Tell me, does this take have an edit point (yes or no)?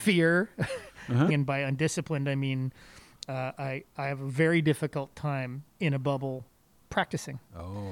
yes